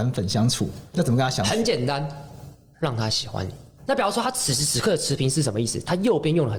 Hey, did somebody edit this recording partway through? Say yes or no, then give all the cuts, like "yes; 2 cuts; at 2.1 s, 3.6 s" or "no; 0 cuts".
yes; 2 cuts; at 0.9 s, 3.8 s